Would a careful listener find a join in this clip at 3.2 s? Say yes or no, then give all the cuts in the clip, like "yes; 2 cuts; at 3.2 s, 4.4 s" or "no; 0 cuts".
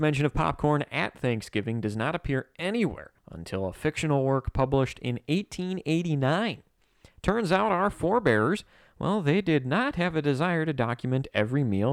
yes; 1 cut; at 3.2 s